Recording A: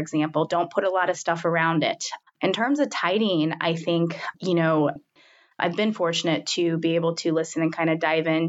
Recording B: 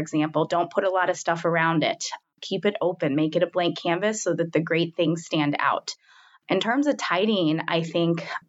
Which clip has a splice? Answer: A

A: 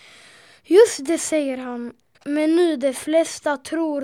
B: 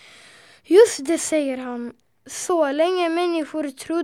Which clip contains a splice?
A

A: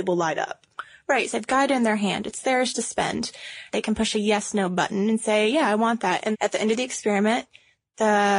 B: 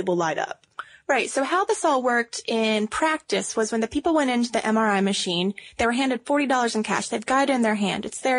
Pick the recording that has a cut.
A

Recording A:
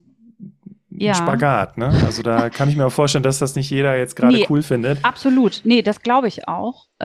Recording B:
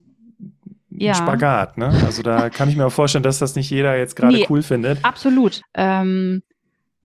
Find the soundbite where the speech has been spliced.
B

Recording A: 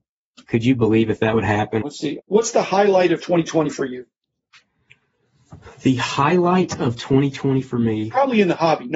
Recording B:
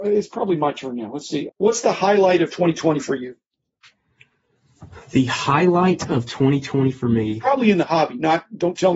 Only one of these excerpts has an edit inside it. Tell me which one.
A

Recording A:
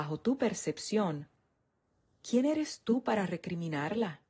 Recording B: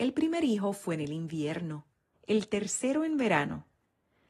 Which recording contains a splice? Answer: B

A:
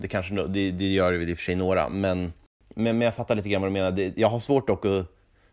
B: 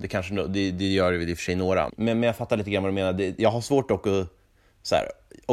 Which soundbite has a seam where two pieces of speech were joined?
B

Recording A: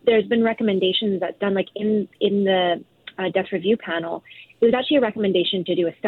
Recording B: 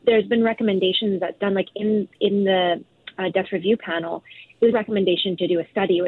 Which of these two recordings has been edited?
B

